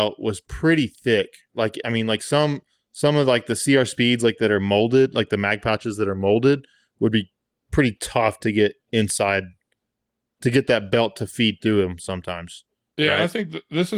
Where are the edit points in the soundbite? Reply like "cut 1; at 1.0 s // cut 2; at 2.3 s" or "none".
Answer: none